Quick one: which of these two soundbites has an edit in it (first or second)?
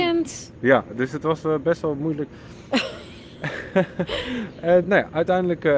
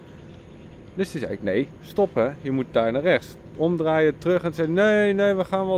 first